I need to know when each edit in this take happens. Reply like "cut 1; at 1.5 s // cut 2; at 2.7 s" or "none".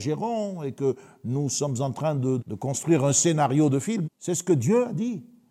cut 1; at 2.4 s // cut 2; at 4.0 s